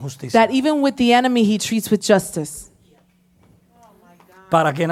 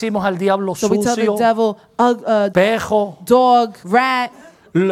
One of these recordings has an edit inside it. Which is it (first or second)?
second